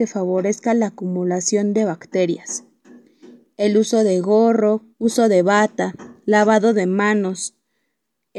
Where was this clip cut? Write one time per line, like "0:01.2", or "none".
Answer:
0:04.9

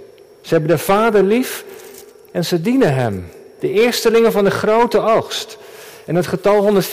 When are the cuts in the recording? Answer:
0:03.6

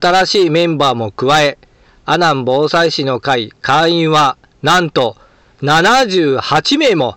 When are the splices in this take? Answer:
none

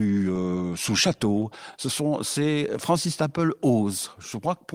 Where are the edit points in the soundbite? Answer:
none

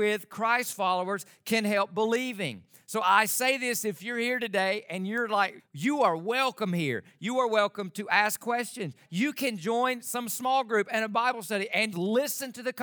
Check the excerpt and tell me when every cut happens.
0:05.6
0:09.1
0:11.9

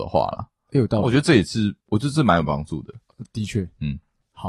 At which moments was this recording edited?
0:01.8

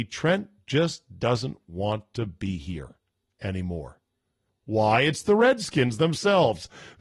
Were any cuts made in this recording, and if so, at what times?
0:04.5

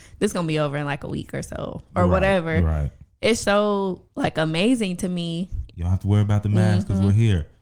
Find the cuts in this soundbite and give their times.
0:03.4
0:05.7

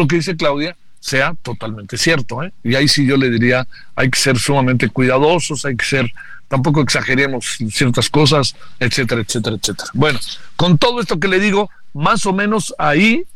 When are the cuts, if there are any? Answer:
none

